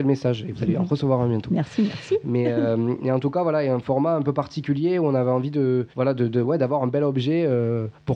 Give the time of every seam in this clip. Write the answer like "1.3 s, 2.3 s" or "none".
5.9 s